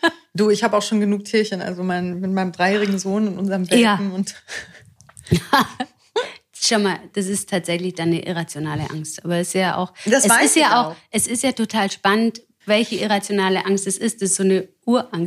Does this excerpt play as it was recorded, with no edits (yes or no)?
yes